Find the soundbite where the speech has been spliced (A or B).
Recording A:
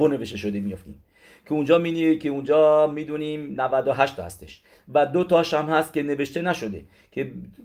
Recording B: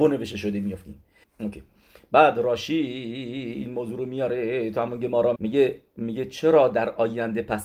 B